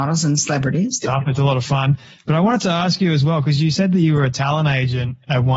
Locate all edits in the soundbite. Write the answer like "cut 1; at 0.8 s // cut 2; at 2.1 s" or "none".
cut 1; at 1.0 s